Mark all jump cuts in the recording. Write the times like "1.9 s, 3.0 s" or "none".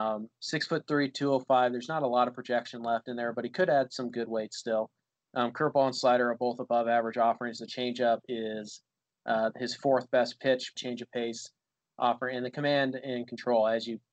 10.8 s